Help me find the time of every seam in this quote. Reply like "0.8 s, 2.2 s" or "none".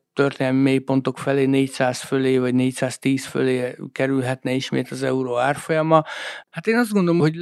6.4 s